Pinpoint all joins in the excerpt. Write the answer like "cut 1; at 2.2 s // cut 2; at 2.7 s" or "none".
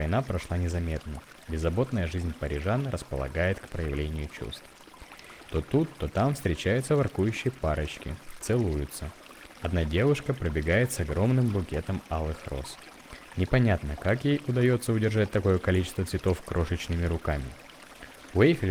cut 1; at 5.5 s